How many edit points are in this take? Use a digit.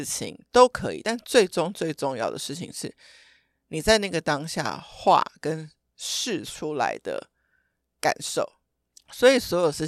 0